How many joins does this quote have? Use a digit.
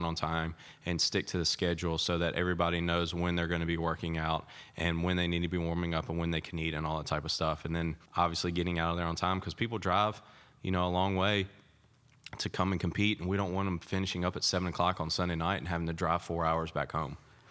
1